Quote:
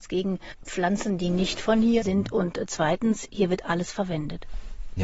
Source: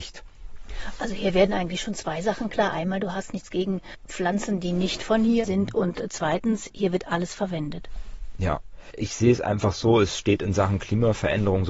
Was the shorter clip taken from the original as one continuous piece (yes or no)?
yes